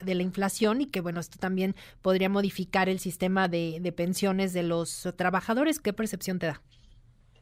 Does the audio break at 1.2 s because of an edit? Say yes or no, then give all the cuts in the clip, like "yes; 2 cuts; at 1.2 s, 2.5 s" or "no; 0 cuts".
no; 1 cut; at 5.8 s